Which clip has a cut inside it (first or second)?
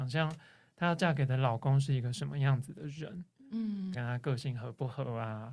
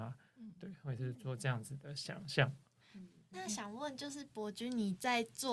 first